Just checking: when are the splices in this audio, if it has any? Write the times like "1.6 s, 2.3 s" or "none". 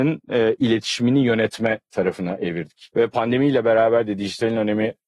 2.9 s